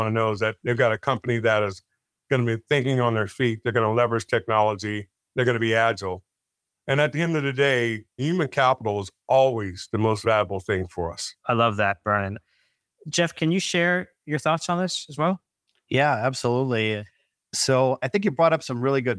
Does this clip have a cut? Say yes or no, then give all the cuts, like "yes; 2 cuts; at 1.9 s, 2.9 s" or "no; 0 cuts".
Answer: no; 0 cuts